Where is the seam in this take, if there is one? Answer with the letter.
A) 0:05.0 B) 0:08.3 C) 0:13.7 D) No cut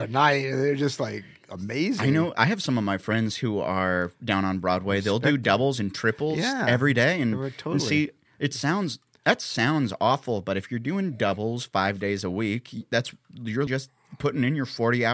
C